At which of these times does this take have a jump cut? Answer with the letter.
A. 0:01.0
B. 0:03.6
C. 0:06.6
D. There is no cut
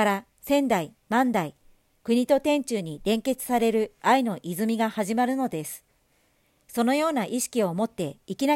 D